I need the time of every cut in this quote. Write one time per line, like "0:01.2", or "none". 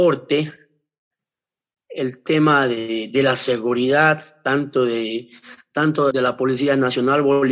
0:06.1